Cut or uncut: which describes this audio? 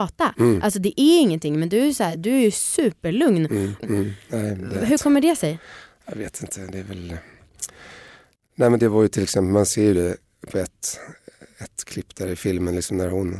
cut